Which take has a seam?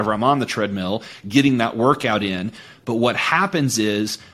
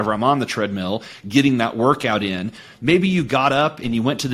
second; 1 cut; at 2.7 s

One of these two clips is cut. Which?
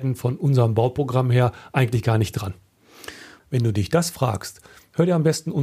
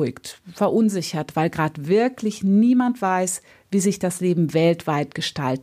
first; 1 cut; at 3.4 s

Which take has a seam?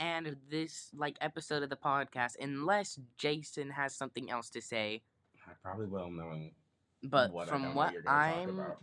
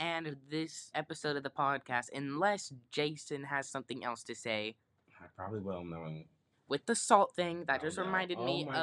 second; 2 cuts; at 0.9 s, 6.5 s

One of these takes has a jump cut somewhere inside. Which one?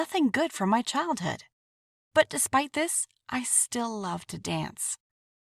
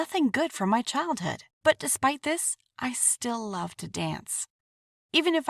second; 1 cut; at 1.5 s

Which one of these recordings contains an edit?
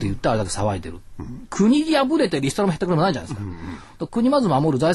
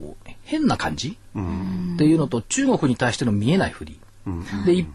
first; 1 cut; at 1.5 s

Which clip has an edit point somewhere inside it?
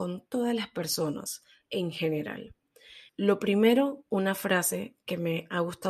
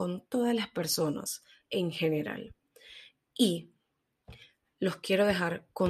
first; 1 cut; at 3.1 s

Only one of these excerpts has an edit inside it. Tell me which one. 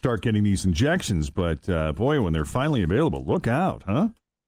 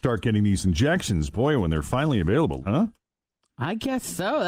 second; 2 cuts; at 1.3 s, 2.6 s

